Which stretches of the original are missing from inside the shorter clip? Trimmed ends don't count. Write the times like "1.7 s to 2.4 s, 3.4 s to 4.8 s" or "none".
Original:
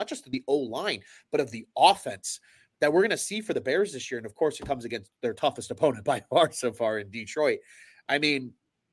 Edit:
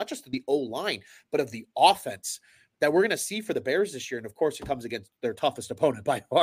none

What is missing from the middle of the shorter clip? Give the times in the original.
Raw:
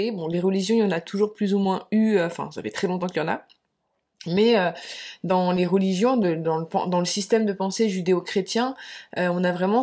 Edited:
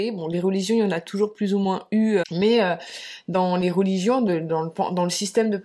2.2 s to 4.2 s

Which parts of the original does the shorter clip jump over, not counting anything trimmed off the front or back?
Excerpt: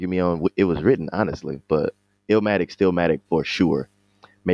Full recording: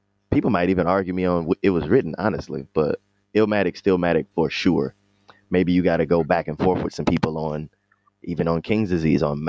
none

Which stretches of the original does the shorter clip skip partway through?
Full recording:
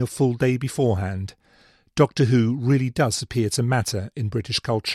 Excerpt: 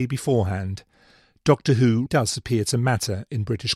2.6 s to 2.9 s

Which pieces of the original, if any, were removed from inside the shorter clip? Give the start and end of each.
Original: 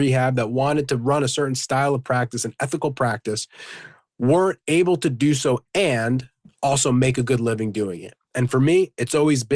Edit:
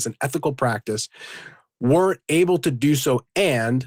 none

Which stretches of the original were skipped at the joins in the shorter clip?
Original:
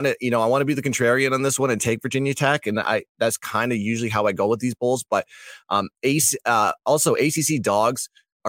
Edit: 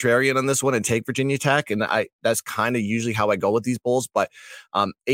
none

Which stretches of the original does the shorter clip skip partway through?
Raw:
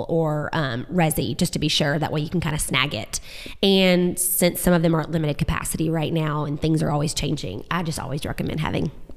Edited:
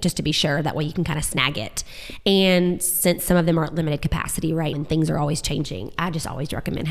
6.1 s to 6.5 s

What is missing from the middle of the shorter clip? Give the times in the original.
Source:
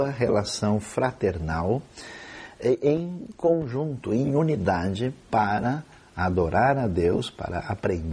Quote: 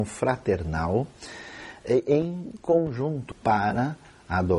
4.1 s to 5.2 s

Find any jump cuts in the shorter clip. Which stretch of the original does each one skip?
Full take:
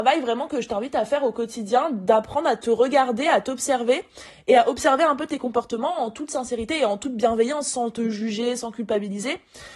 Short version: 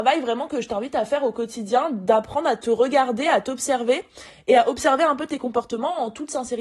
none

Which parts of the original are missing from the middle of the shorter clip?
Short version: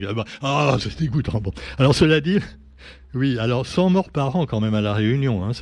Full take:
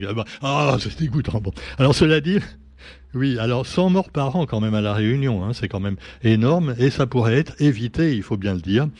none

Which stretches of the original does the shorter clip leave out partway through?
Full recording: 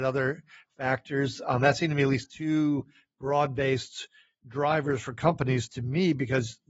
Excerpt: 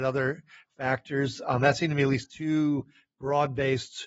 none

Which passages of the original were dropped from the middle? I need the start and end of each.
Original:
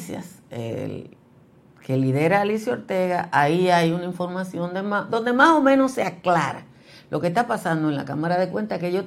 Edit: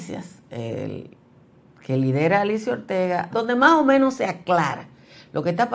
3.3 s to 5.1 s

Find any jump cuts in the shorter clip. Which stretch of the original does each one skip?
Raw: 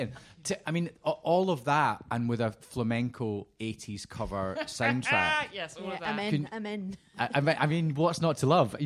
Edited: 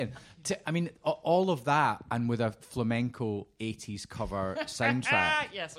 none

